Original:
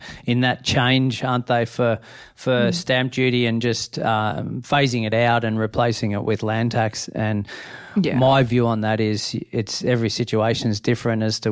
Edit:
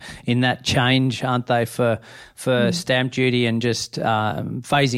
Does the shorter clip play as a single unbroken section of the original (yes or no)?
yes